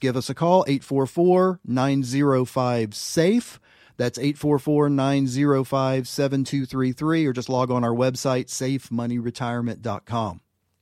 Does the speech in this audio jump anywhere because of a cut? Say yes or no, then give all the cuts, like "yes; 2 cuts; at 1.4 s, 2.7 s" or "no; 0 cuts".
no; 0 cuts